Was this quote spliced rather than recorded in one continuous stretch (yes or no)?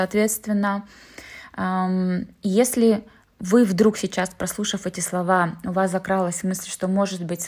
no